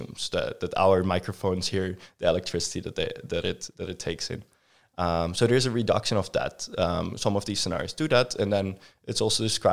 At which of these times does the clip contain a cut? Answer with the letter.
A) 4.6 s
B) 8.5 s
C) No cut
C